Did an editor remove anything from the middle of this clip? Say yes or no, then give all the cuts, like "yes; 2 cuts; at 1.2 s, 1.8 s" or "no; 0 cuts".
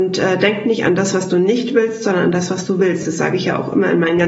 no; 0 cuts